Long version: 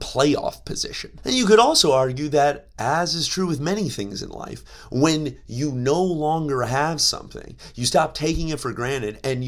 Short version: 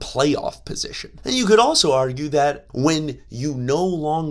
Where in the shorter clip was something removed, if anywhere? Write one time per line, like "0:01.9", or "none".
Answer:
0:02.7

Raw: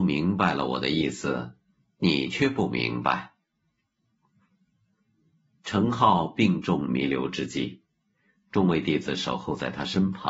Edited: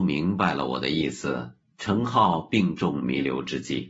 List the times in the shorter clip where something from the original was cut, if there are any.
0:01.6

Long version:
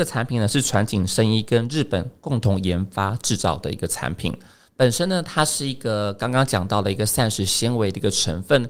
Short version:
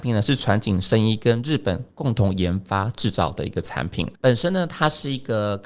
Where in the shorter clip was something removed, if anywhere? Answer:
0:04.2

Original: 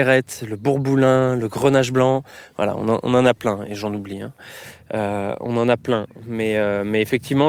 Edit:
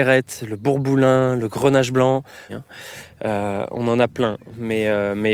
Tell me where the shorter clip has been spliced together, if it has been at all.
0:02.5

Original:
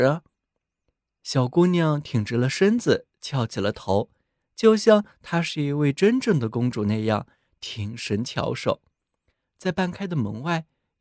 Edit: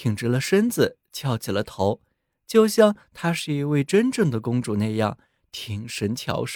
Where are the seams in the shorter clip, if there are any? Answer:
none

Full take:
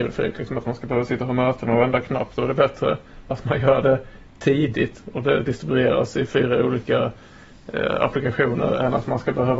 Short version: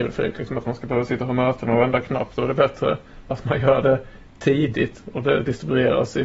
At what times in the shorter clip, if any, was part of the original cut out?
none

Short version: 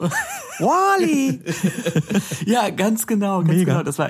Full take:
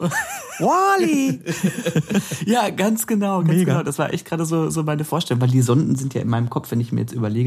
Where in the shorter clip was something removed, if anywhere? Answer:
none

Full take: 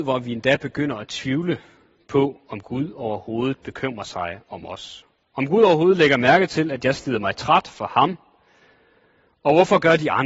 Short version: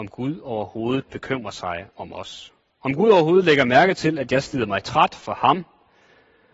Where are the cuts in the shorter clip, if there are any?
none

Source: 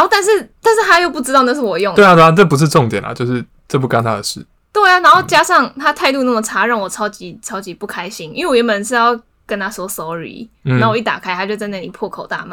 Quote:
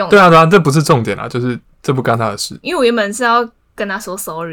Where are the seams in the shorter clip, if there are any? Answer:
0:02.6

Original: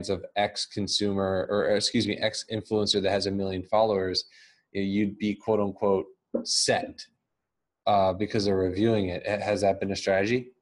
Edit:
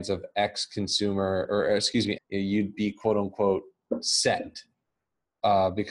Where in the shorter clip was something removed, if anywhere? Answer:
0:02.2

